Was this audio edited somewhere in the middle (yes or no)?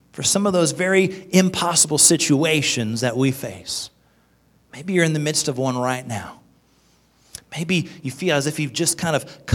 no